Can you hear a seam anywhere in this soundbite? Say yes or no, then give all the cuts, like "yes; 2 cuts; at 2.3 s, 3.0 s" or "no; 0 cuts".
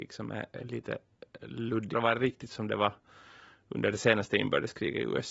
yes; 1 cut; at 1.9 s